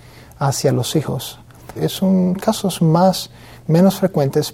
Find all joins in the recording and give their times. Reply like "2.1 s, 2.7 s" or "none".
1.8 s